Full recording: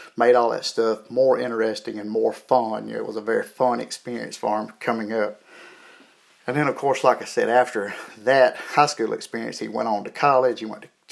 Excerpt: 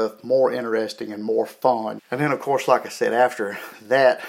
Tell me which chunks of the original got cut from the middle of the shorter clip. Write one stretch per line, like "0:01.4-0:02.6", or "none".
0:02.8-0:06.3